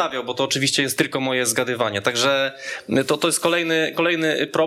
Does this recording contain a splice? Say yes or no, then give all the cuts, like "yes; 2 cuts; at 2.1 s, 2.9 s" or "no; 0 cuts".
yes; 1 cut; at 1.0 s